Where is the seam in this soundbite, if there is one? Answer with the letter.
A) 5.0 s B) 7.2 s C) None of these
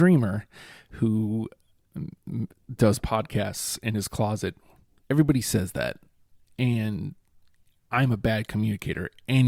A